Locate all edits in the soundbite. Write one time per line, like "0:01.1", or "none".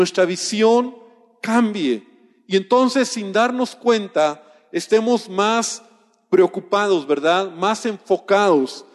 none